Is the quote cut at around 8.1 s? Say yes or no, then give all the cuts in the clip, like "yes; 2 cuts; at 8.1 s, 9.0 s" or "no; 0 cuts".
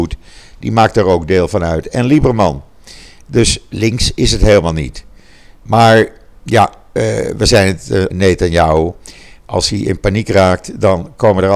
yes; 1 cut; at 8.1 s